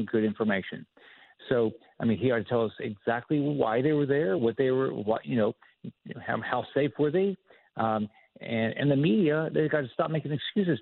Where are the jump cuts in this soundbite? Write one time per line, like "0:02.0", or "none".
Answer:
none